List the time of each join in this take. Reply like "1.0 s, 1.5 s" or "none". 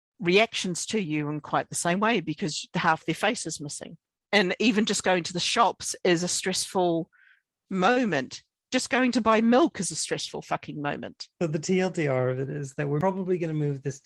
11.3 s

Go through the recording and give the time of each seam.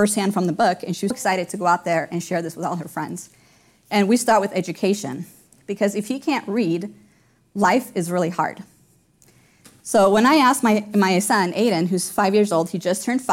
1.1 s, 3.8 s, 5.6 s

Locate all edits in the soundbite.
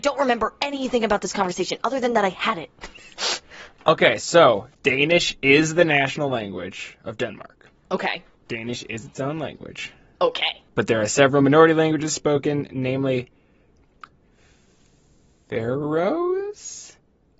4.7 s

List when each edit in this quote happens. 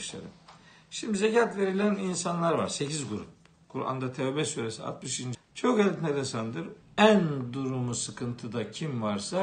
5.3 s, 6.8 s

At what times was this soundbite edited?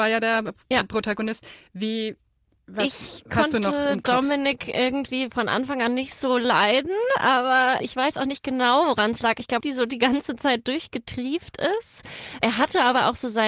9.6 s

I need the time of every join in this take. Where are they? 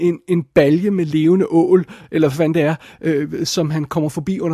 none

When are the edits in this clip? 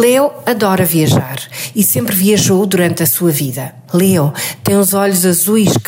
3.9 s

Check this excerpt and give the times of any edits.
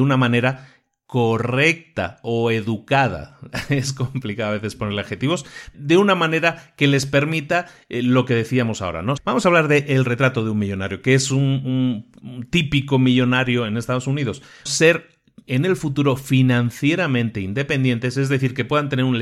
5.7 s, 9.2 s, 14.7 s

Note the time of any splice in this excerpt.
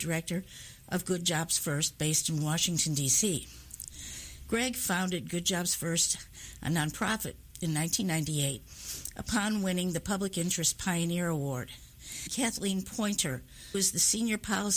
none

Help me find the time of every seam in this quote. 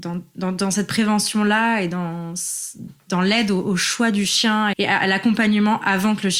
4.7 s

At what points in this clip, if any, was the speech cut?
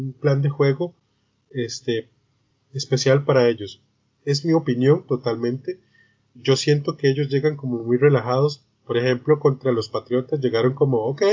none

